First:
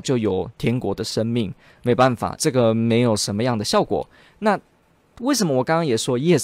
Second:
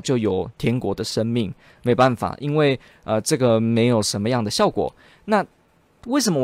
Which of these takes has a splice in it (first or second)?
first